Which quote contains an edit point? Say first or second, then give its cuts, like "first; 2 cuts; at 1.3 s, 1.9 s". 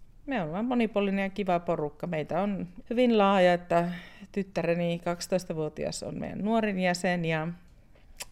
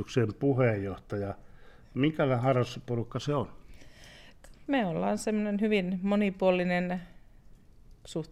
first; 1 cut; at 2.8 s